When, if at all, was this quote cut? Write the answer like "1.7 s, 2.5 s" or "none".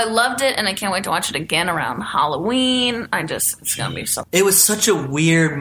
4.2 s